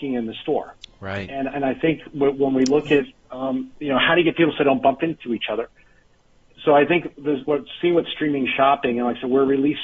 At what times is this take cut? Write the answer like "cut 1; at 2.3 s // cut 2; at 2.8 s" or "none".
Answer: none